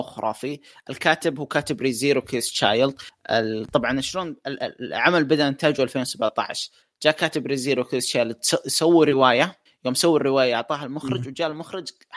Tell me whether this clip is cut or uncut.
uncut